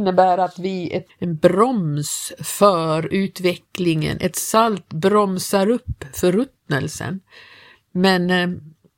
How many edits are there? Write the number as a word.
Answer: one